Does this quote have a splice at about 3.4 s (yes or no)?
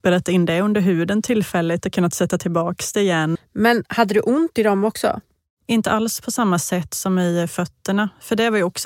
yes